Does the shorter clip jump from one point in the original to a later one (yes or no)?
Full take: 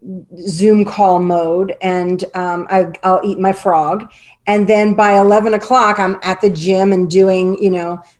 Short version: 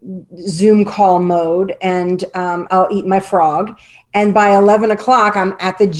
yes